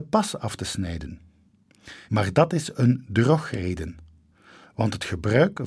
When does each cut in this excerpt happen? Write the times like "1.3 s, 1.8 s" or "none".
2.1 s